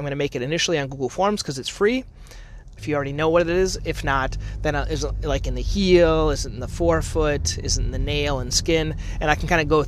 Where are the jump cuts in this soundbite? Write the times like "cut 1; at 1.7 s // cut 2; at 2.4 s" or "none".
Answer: cut 1; at 2.8 s